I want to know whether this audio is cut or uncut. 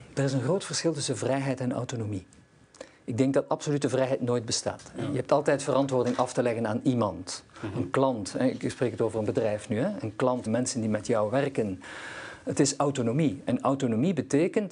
cut